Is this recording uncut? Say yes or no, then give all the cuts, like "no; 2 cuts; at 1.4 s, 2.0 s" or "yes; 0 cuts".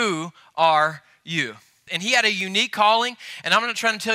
no; 1 cut; at 1.9 s